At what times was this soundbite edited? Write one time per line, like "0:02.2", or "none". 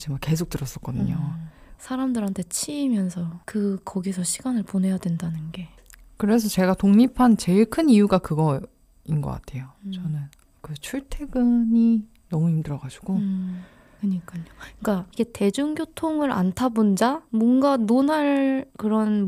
0:01.8
0:14.0

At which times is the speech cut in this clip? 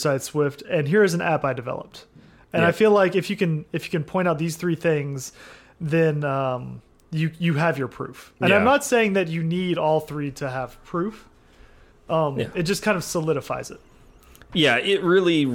0:08.4

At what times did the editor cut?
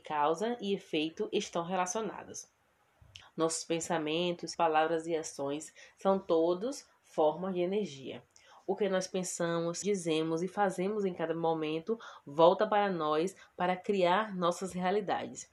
0:03.2
0:04.5
0:09.8

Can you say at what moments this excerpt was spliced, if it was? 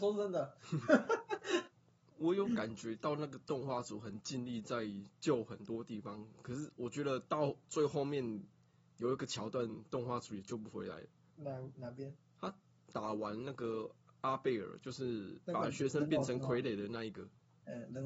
none

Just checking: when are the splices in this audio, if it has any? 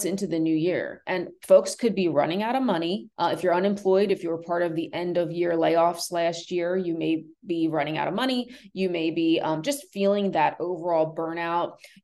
0:03.1

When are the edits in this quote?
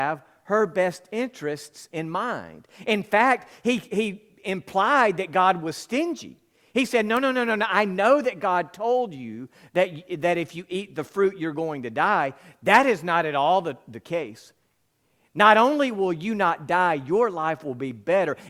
none

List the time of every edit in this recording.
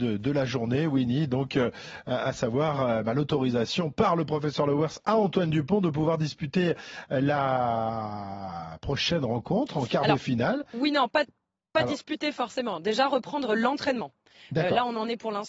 none

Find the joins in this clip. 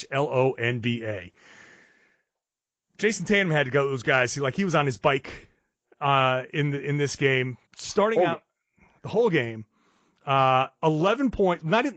0:07.7

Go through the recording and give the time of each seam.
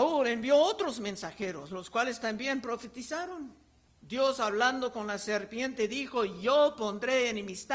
0:04.0

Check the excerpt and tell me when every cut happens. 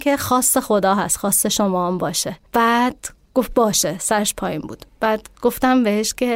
0:02.5

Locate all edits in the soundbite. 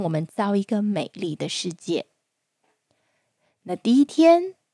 none

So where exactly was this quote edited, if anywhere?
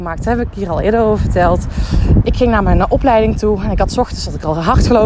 0:02.2

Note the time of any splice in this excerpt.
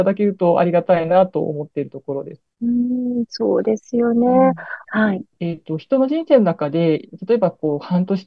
0:02.5
0:04.8

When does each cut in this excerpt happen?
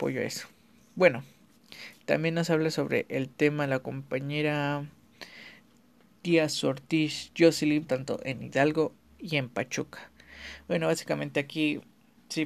0:07.9

